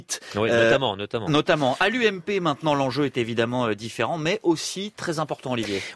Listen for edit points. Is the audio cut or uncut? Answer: uncut